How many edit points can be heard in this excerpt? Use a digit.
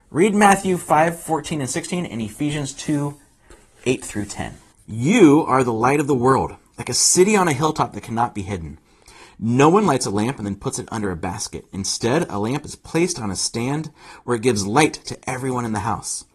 0